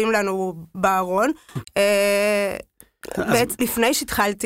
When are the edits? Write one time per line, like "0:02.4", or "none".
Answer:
0:01.6
0:03.6